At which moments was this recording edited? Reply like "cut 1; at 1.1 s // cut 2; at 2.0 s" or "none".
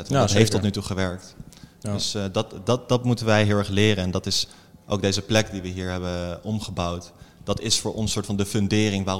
none